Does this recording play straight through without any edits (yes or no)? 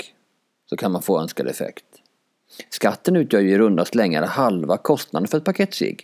yes